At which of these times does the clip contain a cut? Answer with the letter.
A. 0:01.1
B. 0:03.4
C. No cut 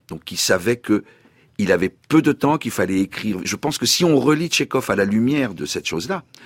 C